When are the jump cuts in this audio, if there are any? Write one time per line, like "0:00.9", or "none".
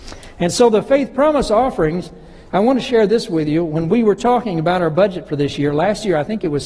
none

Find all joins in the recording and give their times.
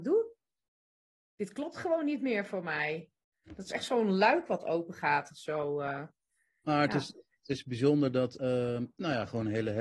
0:08.4

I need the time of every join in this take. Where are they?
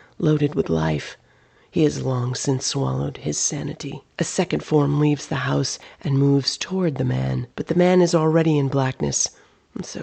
0:01.6
0:04.1
0:07.5

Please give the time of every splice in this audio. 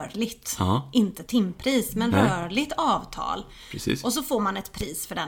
none

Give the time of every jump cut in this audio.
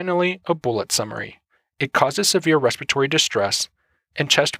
0:01.6

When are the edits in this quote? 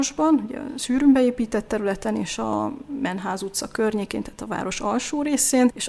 none

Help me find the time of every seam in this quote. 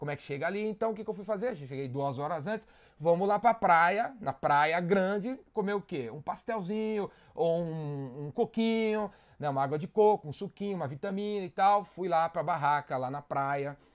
none

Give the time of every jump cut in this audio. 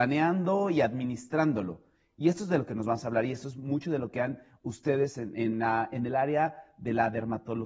0:05.3

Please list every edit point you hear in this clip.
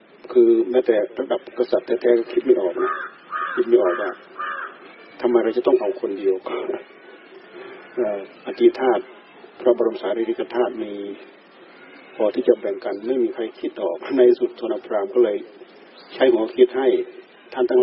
0:08.4

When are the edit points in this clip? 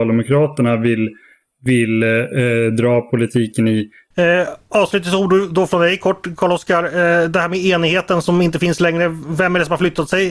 0:04.1

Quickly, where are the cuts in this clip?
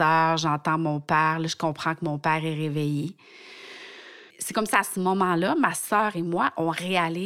0:04.3

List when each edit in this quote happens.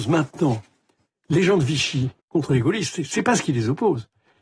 0:02.2

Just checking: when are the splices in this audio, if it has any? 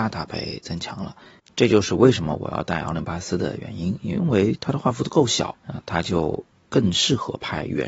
0:05.5

